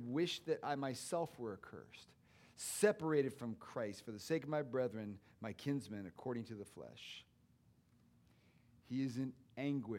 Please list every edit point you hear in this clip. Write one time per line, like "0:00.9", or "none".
none

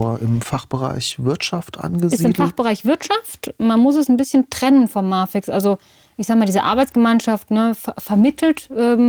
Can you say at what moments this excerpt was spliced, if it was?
none

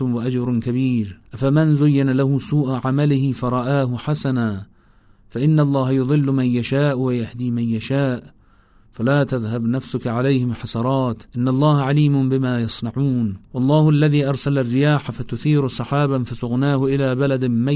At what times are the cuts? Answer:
0:01.2
0:11.3
0:13.4

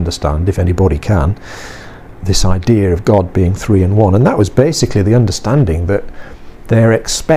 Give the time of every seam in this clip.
0:02.1

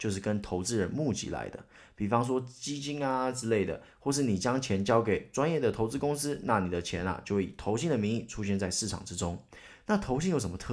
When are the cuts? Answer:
none

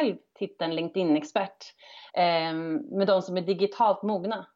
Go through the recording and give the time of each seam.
0:02.1

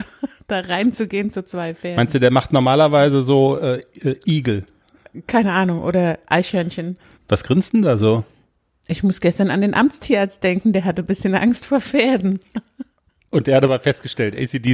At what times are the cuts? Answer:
0:07.1

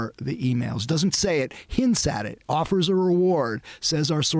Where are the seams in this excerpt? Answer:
0:01.1

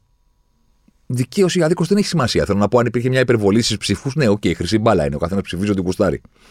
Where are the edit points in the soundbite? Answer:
none

